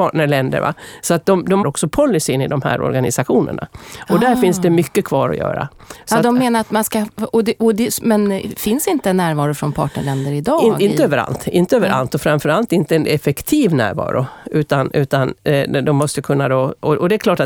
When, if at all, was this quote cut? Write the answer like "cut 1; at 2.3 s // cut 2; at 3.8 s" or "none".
cut 1; at 1.6 s

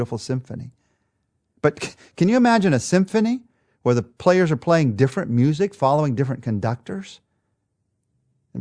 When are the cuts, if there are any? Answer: none

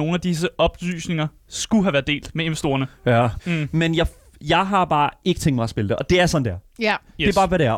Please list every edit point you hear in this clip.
cut 1; at 3.4 s

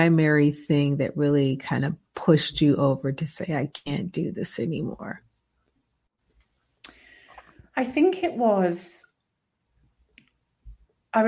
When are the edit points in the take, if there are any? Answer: none

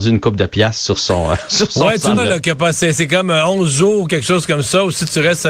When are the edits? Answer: cut 1; at 2.2 s

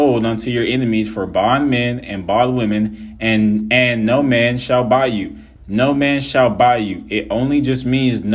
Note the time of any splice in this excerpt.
cut 1; at 5.6 s

